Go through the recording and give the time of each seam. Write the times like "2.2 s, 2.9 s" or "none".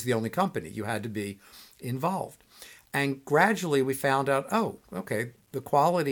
none